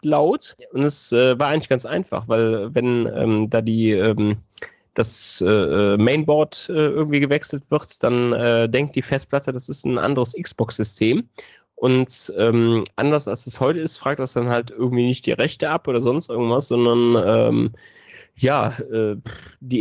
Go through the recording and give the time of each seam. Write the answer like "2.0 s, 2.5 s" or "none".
none